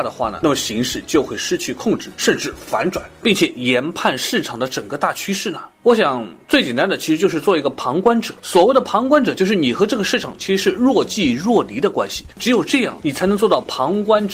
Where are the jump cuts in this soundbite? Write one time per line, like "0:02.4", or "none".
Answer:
0:03.2